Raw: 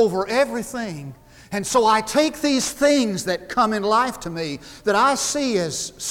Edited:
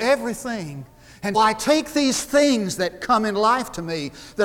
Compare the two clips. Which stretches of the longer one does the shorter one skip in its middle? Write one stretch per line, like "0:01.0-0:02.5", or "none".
0:01.6-0:01.8